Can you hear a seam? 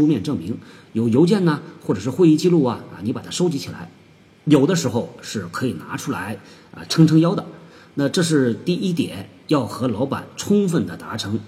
no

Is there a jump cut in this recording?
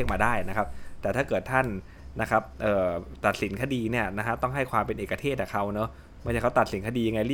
no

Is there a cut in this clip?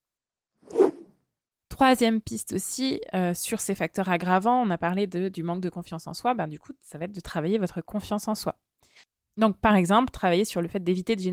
no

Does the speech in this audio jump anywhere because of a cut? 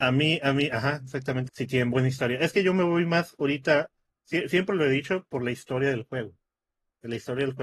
yes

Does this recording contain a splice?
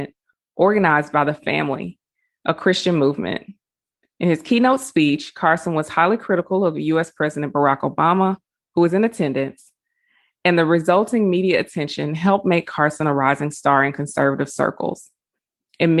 no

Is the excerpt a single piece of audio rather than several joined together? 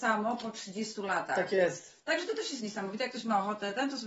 yes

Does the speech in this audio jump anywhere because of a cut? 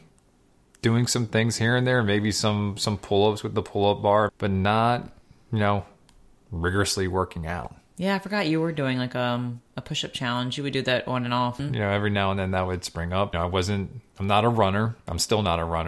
yes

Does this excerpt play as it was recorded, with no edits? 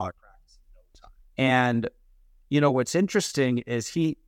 no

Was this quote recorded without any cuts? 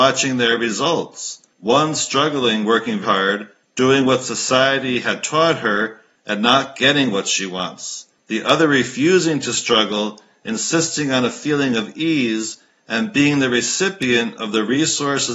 no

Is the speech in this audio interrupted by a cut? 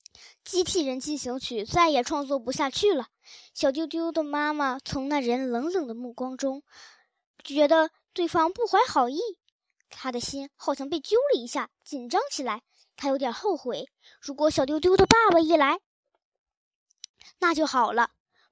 no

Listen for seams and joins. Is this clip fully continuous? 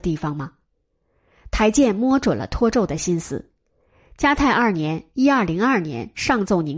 yes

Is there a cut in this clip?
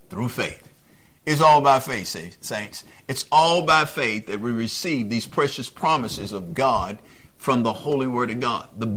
no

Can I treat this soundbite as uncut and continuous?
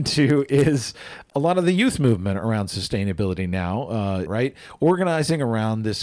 no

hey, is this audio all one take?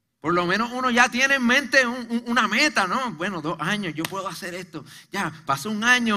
yes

